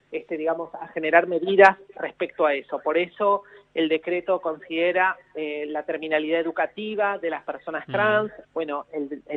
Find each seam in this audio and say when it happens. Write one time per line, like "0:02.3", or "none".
0:08.4